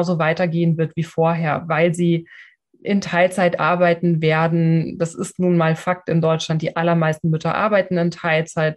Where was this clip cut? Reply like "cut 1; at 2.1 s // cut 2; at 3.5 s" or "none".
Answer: none